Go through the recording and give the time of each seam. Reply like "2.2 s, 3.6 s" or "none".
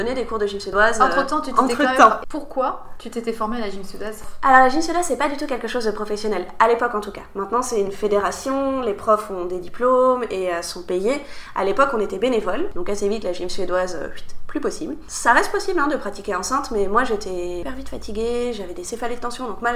2.2 s, 12.7 s